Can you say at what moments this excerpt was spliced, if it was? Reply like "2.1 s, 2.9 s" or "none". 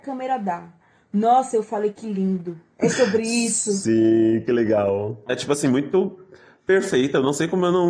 2.7 s, 5.3 s